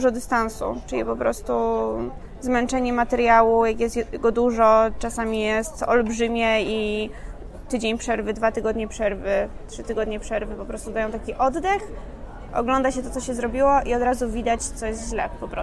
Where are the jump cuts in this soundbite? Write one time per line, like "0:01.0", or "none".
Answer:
none